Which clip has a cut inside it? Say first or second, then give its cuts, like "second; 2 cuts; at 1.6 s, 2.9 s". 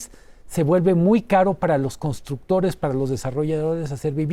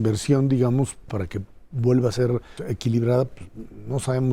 second; 2 cuts; at 1.1 s, 2.6 s